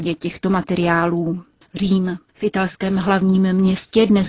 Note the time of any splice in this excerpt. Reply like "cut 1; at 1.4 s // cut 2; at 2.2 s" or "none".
cut 1; at 1.6 s

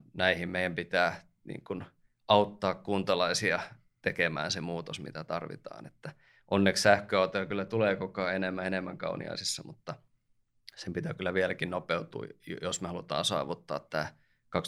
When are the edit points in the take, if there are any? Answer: none

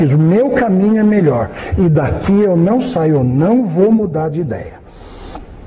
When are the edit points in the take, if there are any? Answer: cut 1; at 1.7 s

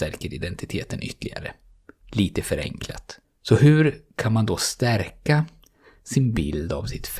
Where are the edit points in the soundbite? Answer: cut 1; at 3.2 s

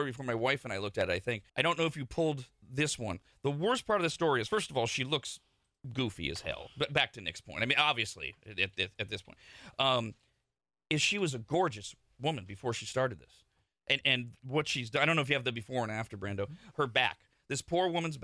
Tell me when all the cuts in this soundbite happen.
cut 1; at 1.5 s // cut 2; at 14.0 s // cut 3; at 16.7 s

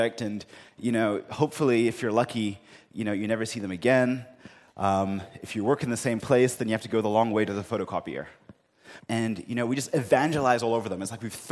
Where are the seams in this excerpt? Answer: cut 1; at 9.0 s

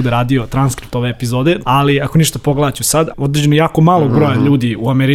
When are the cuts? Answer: cut 1; at 1.6 s // cut 2; at 3.1 s

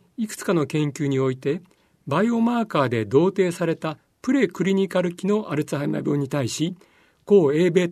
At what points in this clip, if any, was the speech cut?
none

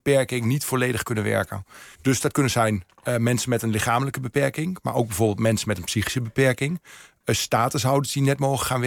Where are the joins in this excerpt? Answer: cut 1; at 1.9 s

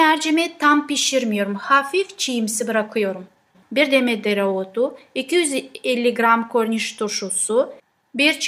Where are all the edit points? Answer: cut 1; at 3.6 s

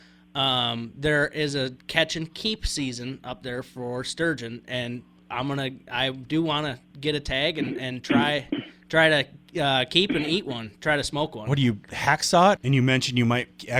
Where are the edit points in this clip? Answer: cut 1; at 12.6 s

